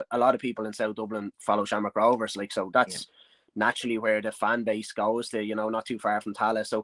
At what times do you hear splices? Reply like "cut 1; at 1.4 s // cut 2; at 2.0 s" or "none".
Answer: none